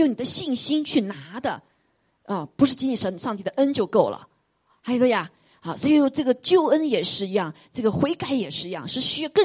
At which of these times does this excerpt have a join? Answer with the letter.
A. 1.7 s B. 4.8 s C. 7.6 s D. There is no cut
D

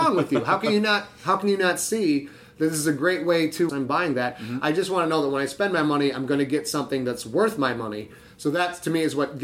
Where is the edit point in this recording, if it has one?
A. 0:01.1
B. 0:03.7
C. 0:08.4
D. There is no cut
B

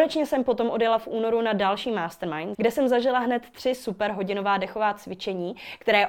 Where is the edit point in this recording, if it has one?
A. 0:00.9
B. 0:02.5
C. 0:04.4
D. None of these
B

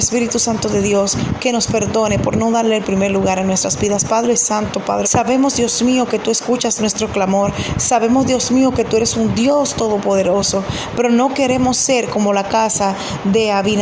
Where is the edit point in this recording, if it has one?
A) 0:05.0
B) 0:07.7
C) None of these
A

